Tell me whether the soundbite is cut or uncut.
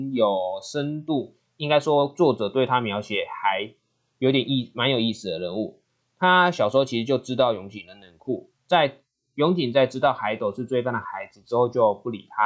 uncut